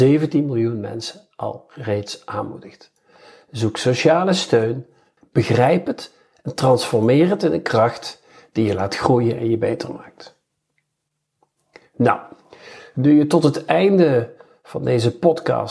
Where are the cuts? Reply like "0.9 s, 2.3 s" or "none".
5.2 s